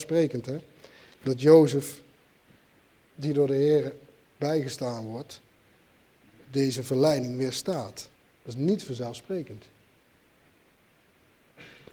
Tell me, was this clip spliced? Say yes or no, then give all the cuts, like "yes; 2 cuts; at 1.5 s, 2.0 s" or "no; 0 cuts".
no; 0 cuts